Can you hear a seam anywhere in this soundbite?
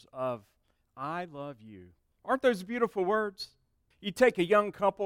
yes; 1 cut; at 3.9 s

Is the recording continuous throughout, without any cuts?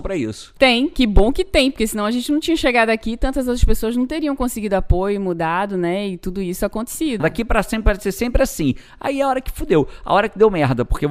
no; 1 cut; at 7.2 s

